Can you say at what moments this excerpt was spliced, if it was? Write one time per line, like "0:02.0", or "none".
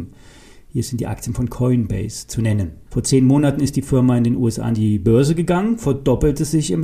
0:02.9